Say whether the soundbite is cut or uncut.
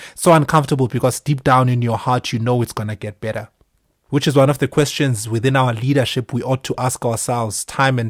cut